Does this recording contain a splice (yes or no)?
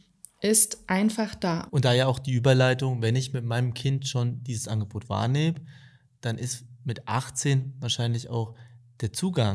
yes